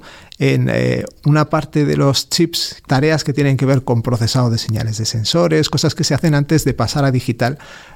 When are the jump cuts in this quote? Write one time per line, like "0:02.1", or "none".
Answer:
0:02.8